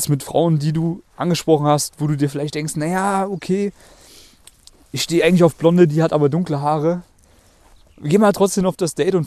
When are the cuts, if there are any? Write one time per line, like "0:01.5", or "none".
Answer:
none